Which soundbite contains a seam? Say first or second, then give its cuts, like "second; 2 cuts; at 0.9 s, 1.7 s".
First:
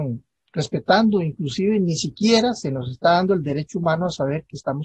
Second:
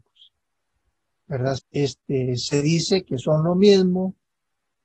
second; 1 cut; at 1.6 s